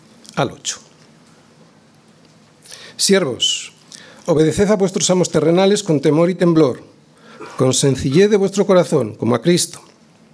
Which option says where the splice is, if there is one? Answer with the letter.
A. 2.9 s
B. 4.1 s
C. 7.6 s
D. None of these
D